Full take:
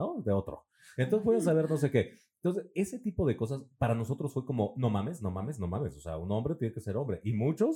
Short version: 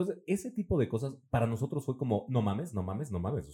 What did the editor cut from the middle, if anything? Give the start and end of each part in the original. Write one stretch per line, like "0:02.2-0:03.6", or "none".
none